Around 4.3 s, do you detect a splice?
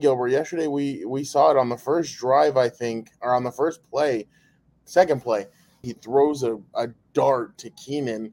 no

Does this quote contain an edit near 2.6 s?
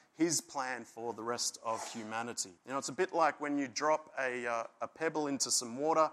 yes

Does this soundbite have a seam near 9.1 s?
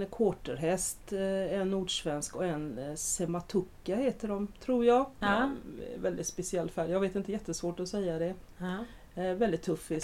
no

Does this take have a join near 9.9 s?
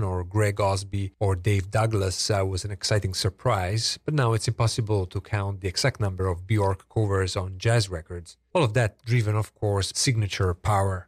yes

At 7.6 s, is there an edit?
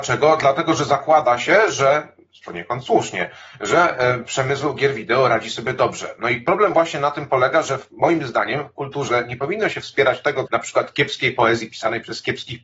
no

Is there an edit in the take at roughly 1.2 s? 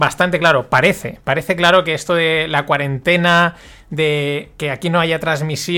no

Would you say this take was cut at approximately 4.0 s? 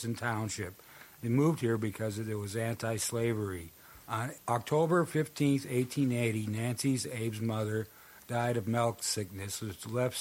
yes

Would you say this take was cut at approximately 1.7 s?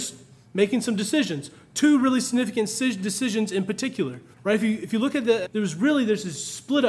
no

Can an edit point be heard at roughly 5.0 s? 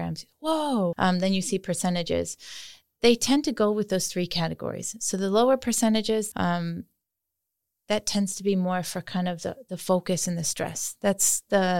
no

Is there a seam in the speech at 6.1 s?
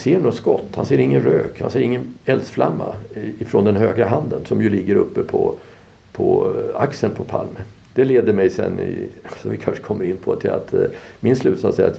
no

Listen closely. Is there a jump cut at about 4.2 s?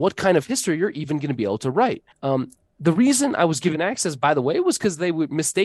no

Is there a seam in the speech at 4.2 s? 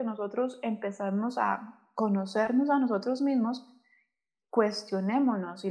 no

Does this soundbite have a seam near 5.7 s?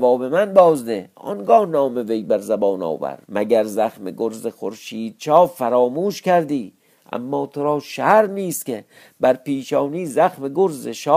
no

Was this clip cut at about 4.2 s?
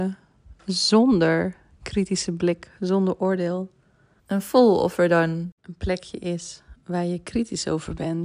yes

